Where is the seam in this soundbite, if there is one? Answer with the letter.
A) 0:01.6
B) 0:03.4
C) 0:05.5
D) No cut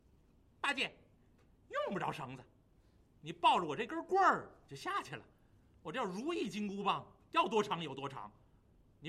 D